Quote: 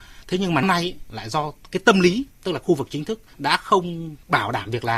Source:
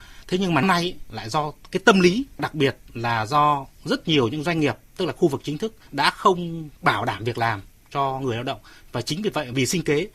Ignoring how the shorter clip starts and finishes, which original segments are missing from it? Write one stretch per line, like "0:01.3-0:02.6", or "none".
0:02.3-0:04.8